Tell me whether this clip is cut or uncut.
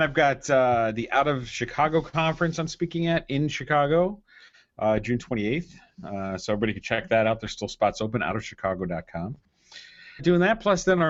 cut